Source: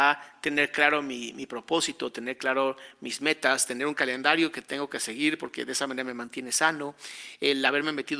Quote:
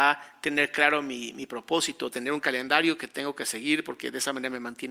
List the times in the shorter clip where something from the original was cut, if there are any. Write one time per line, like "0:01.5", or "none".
0:02.1